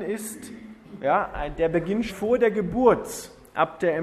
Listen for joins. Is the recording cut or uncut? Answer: cut